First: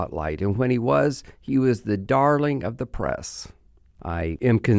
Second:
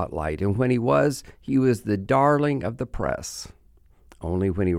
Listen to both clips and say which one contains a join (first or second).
first